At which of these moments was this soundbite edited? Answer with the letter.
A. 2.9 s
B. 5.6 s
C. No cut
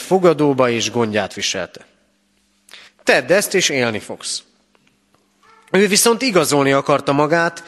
A